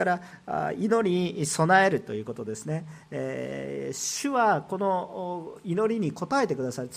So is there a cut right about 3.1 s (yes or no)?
no